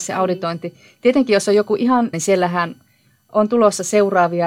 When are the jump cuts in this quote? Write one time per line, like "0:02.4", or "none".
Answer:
0:02.1